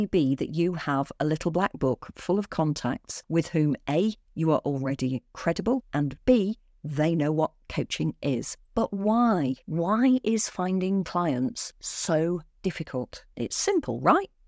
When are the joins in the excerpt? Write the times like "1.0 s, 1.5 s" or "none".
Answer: 8.6 s, 13.3 s

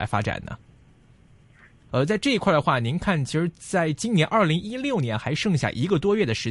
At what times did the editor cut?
1.9 s

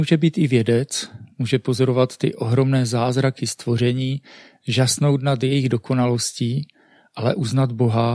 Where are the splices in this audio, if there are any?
none

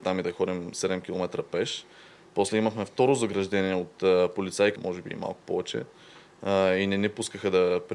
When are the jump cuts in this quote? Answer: 4.8 s

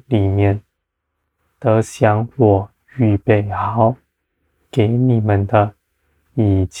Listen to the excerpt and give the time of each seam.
none

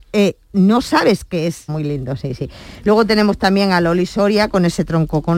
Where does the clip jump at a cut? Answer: 1.7 s

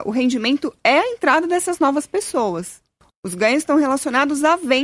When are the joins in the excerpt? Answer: 3.1 s

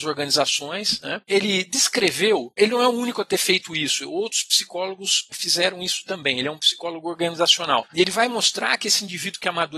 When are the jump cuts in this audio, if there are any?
7.9 s

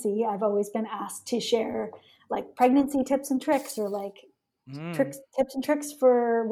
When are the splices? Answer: none

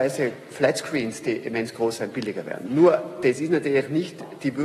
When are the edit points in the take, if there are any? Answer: none

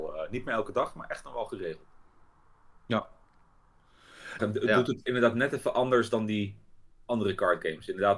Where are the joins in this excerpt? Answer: 4.4 s

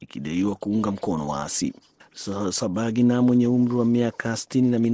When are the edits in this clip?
2.0 s

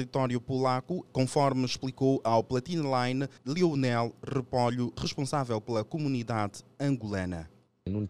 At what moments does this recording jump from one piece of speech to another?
1.1 s, 3.4 s

